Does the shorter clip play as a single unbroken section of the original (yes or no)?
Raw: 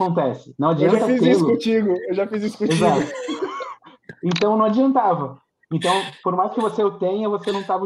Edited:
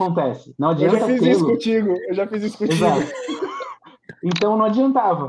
yes